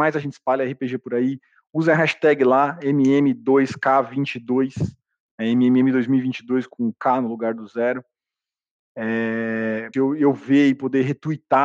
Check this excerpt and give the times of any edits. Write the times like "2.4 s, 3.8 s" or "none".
9.9 s